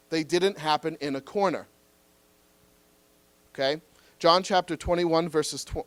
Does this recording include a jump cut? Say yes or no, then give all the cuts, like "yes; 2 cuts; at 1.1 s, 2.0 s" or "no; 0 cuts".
yes; 1 cut; at 3.5 s